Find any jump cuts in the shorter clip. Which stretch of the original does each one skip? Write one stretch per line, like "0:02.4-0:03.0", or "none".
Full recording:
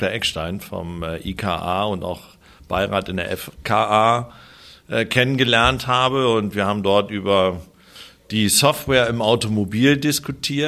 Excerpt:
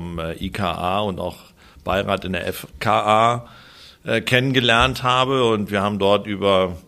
none